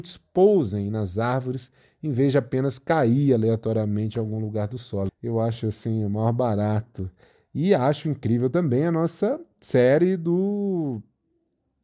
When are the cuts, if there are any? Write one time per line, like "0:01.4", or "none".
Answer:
0:05.1